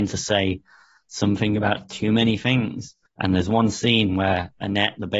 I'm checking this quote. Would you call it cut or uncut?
cut